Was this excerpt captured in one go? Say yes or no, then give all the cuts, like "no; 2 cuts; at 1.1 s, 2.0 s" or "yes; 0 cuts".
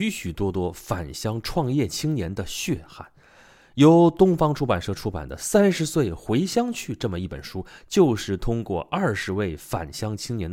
yes; 0 cuts